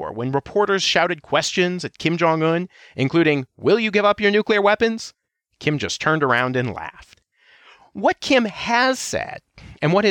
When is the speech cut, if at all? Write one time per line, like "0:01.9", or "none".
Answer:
none

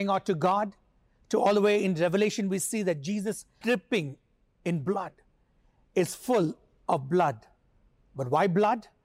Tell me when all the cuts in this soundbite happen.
0:03.6

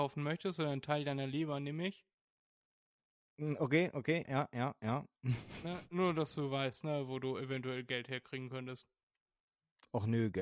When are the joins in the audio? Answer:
0:04.3

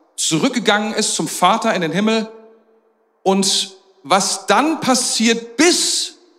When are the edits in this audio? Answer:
none

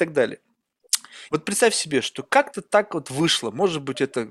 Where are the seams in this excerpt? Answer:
0:01.3

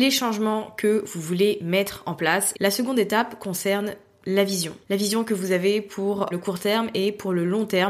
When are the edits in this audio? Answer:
0:02.5
0:04.8
0:06.3

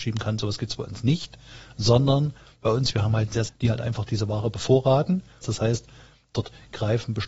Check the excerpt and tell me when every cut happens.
0:03.4
0:05.4

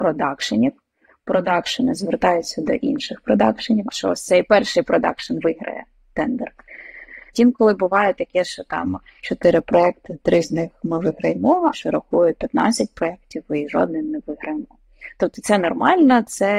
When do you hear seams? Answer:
0:03.9
0:07.3
0:11.7

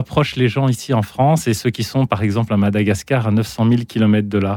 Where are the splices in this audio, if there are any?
none

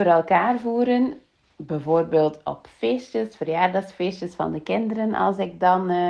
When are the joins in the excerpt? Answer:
none

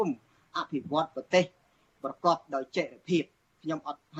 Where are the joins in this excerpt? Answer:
none

